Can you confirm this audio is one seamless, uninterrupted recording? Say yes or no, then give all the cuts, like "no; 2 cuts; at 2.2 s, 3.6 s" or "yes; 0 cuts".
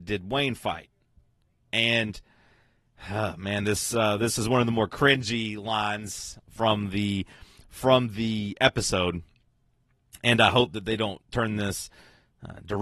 yes; 0 cuts